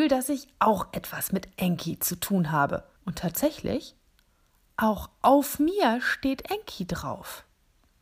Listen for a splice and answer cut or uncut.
cut